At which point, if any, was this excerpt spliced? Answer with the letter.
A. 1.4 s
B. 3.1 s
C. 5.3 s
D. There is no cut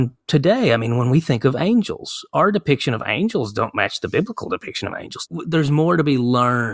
C